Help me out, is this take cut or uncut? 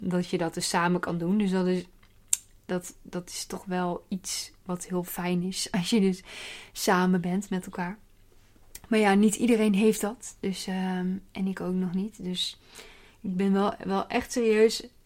uncut